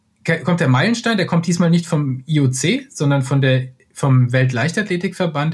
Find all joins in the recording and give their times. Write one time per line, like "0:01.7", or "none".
none